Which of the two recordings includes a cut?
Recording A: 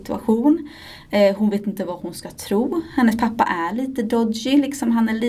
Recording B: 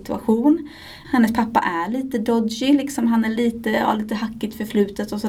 B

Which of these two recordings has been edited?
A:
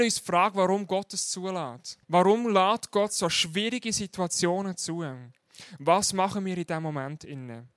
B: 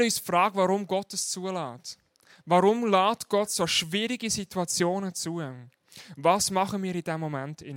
A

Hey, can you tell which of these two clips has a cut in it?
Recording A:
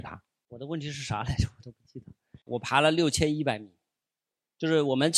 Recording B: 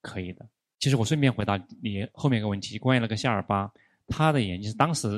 A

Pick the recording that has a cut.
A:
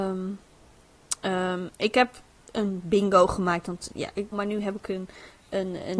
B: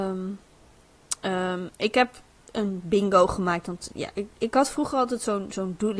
A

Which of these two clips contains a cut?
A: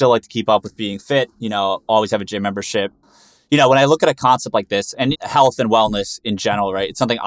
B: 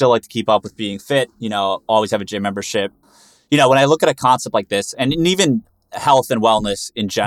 A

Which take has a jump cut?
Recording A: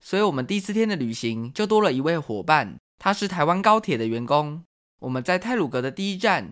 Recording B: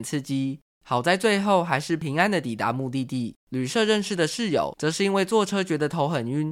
B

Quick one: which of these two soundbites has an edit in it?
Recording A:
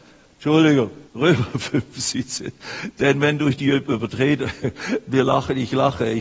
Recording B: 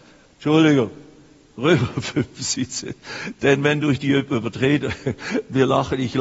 A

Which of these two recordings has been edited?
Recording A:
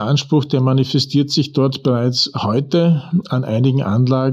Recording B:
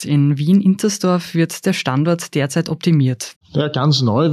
B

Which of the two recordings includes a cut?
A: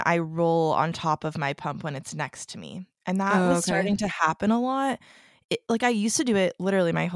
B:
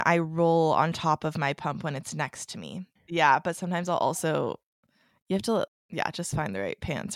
B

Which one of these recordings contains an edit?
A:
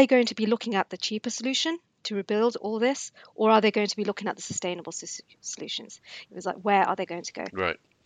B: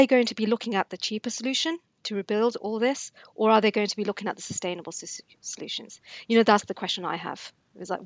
A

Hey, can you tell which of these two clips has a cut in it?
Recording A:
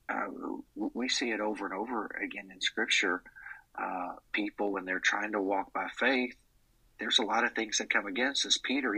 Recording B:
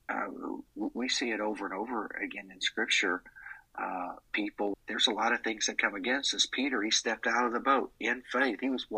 B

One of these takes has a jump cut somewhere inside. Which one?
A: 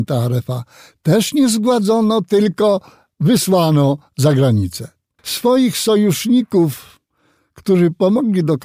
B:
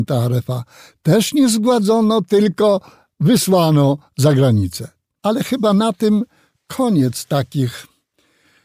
A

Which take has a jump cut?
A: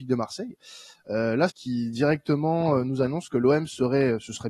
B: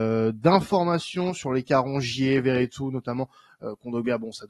A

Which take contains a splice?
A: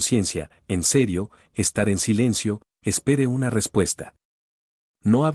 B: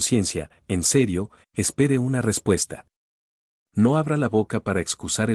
B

